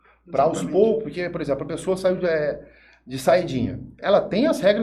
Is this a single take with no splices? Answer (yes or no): yes